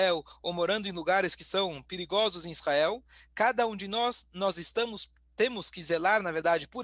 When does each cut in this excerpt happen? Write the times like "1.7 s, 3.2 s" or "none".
none